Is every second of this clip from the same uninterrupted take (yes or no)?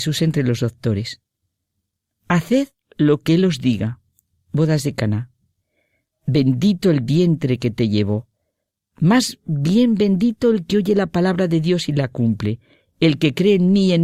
yes